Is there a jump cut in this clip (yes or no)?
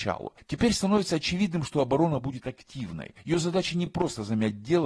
no